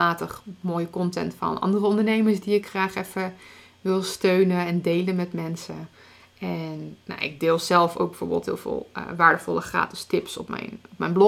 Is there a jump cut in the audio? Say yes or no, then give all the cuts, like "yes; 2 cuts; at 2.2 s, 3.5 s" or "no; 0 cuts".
no; 0 cuts